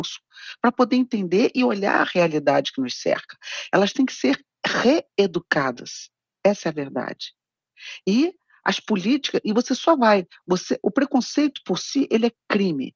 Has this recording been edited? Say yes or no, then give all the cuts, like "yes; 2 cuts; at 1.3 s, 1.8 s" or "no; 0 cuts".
no; 0 cuts